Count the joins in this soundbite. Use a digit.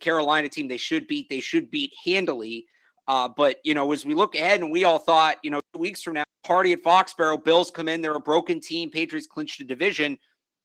1